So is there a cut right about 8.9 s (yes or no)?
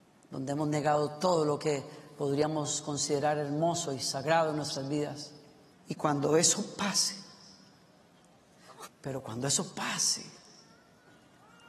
yes